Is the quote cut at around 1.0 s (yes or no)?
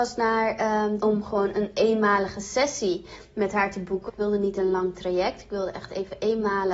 yes